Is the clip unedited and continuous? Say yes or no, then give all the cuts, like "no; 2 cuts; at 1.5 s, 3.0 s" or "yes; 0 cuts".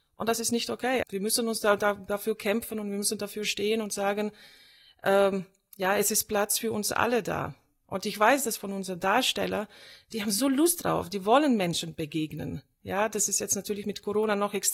no; 1 cut; at 1.0 s